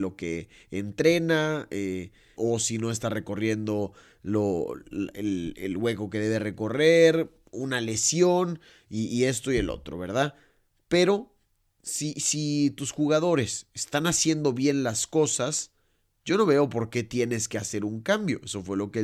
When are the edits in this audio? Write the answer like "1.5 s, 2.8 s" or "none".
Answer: 2.4 s